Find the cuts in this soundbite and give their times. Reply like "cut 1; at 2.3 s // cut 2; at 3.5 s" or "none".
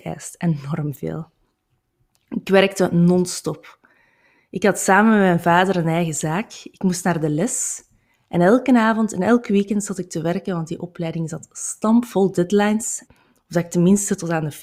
cut 1; at 13.1 s